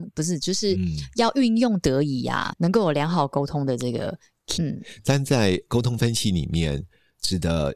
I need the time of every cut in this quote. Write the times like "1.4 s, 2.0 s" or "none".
2.5 s, 4.6 s